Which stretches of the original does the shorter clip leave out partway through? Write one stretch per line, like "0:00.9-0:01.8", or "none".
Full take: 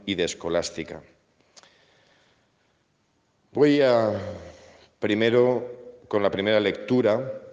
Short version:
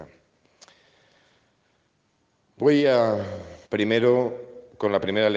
0:04.6-0:04.9